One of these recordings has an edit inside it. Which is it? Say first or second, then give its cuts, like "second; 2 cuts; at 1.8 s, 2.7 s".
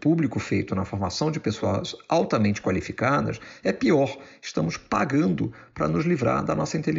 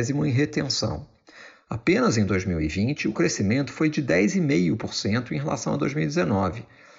second; 1 cut; at 1.5 s